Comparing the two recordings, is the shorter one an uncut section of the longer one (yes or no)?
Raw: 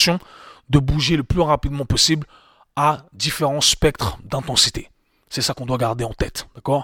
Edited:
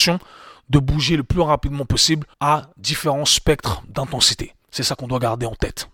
no